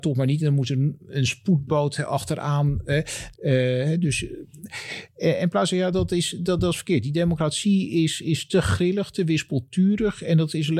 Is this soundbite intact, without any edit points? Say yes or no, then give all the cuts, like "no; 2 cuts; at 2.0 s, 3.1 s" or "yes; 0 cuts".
no; 2 cuts; at 3.3 s, 5.9 s